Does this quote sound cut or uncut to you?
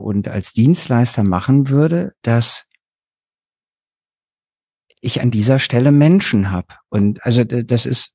cut